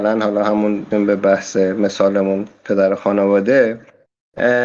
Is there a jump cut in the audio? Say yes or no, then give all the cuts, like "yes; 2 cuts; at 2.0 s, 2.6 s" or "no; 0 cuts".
yes; 1 cut; at 0.9 s